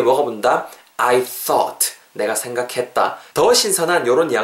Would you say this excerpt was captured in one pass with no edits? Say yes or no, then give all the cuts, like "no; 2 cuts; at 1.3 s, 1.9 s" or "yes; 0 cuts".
no; 1 cut; at 3.3 s